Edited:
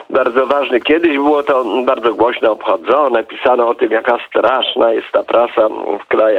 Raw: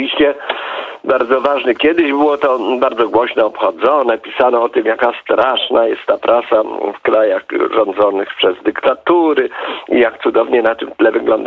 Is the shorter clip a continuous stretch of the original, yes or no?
yes